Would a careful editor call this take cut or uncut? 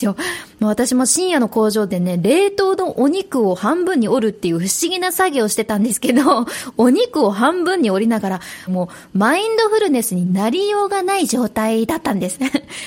cut